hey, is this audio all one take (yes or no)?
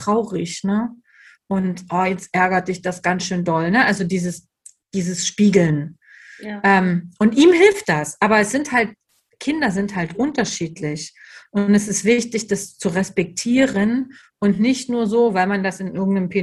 yes